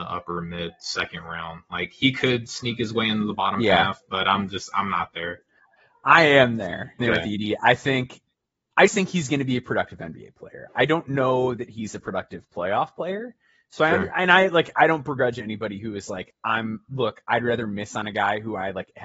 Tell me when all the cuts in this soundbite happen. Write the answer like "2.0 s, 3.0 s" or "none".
7.0 s, 8.9 s